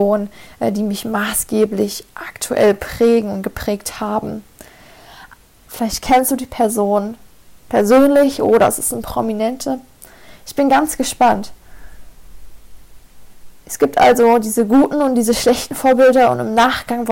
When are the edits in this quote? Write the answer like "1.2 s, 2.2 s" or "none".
5.6 s